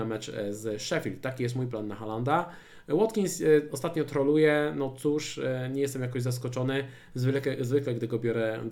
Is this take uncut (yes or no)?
yes